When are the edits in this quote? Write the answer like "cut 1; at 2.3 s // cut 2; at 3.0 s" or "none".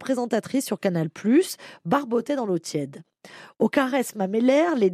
none